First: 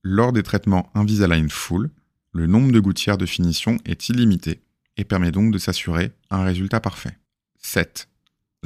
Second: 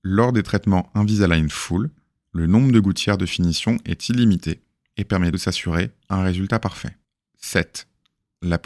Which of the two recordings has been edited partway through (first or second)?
second